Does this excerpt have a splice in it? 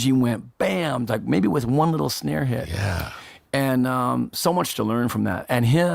no; 0 cuts

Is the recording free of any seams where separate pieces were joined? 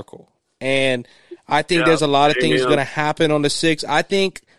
yes; 0 cuts

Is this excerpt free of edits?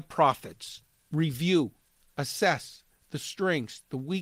no; 1 cut; at 0.9 s

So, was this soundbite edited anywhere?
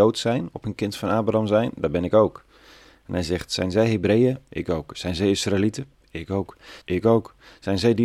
yes; 1 cut; at 6.8 s

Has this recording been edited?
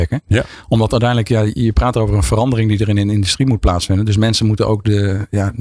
no; 0 cuts

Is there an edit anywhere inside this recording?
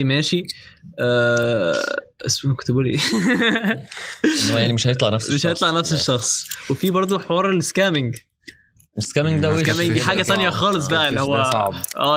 no; 0 cuts

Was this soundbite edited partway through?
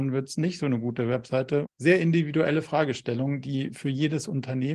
yes; 1 cut; at 1.6 s

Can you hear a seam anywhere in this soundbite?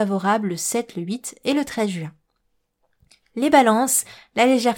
no; 0 cuts

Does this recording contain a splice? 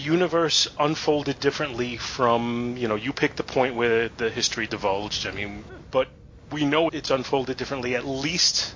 yes; 2 cuts; at 5.8 s, 6.9 s

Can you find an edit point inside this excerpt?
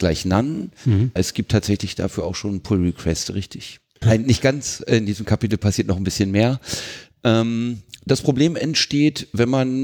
yes; 2 cuts; at 1.2 s, 4.0 s

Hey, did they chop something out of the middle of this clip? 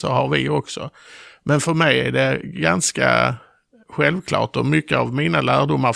no; 0 cuts

